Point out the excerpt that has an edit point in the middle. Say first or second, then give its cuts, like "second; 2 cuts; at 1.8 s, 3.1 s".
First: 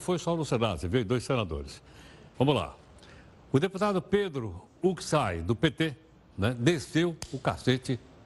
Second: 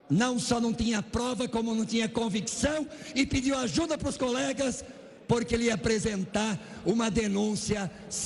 first; 1 cut; at 2.3 s